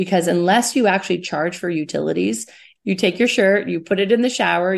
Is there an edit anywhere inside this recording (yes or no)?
yes